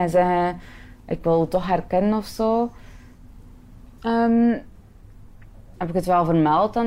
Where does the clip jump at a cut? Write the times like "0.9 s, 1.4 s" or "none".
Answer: 4.0 s, 5.8 s